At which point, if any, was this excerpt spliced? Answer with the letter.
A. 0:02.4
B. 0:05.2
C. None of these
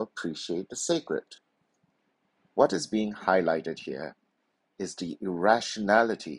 A